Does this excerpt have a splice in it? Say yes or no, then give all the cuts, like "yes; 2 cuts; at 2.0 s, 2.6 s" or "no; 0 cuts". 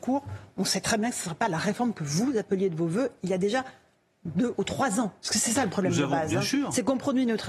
yes; 1 cut; at 5.2 s